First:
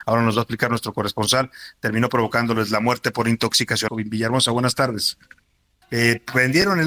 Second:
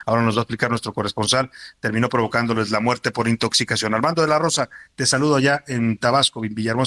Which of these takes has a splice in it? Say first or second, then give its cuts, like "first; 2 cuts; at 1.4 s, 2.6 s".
first; 2 cuts; at 3.9 s, 5.8 s